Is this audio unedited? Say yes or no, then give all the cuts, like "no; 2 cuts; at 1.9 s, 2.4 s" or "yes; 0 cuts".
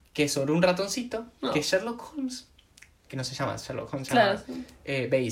yes; 0 cuts